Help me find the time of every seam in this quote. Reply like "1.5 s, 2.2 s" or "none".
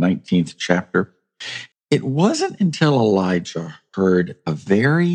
1.7 s